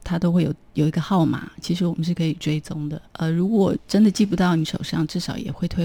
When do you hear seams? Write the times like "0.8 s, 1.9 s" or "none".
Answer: 3.0 s

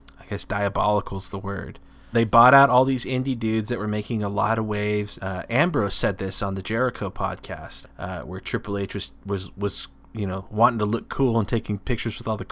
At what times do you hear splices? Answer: 2.1 s, 5.2 s, 7.8 s

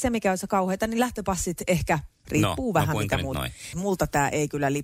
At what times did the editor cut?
2.2 s, 3.7 s

